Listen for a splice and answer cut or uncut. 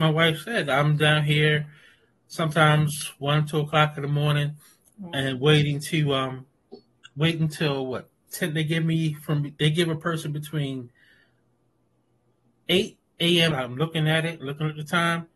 cut